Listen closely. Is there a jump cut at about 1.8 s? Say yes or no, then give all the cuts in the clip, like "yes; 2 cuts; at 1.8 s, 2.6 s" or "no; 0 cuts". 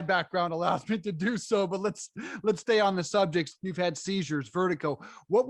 no; 1 cut; at 3.5 s